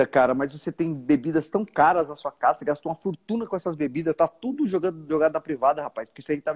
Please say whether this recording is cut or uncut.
uncut